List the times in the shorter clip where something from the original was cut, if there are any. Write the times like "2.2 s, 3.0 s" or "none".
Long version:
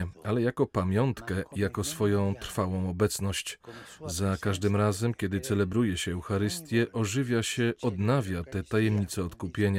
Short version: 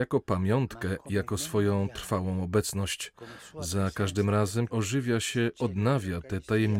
4.7 s

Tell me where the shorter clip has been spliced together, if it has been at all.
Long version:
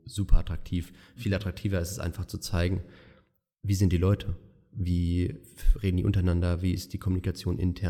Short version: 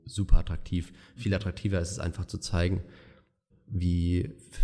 3.5 s

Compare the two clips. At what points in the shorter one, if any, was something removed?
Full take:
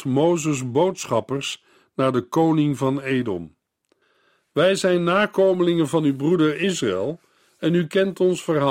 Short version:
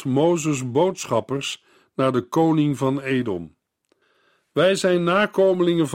none

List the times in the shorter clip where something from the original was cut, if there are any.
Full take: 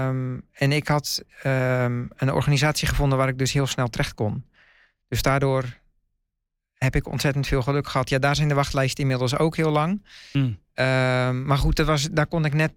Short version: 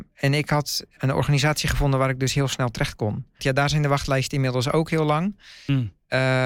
1.0 s, 3.4 s

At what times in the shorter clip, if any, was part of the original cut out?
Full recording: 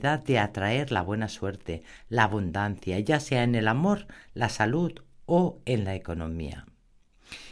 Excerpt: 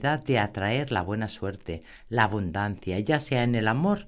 none

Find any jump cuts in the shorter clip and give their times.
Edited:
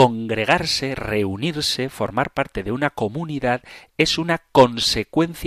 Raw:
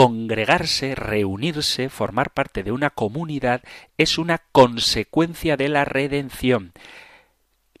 none

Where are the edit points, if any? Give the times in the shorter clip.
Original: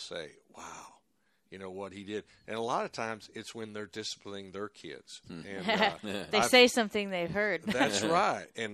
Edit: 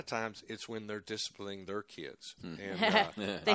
none

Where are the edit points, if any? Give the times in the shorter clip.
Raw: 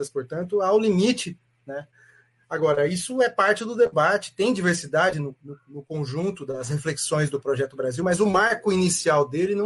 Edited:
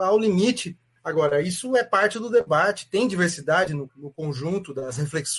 1.0 s, 3.9 s

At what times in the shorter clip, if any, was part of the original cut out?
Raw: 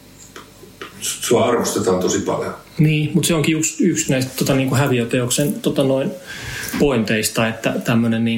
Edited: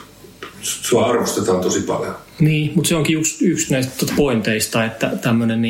4.1 s

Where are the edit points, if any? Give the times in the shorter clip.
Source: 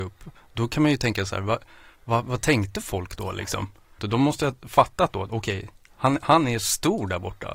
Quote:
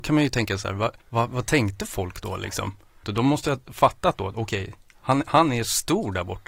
1.0 s

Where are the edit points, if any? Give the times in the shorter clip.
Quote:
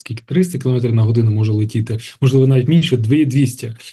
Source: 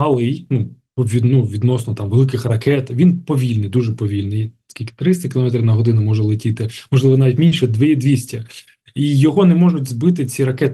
none

